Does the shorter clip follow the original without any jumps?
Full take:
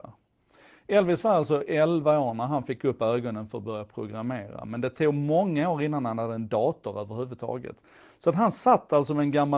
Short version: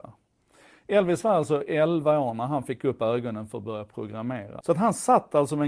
no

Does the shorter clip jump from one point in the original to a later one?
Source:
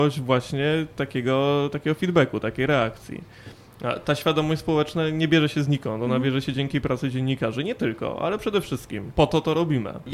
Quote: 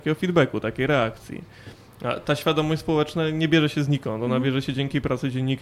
no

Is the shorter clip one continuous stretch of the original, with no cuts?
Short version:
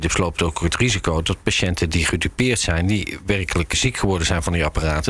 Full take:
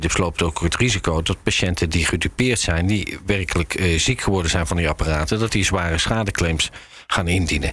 no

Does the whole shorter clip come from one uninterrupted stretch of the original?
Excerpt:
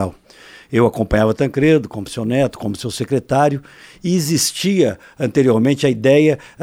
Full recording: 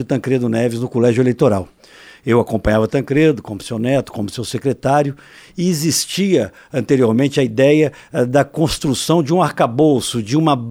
yes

